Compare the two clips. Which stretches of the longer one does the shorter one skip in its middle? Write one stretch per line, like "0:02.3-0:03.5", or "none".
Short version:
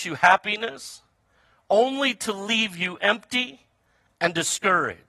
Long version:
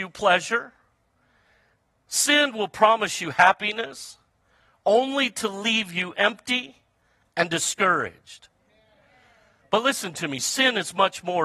none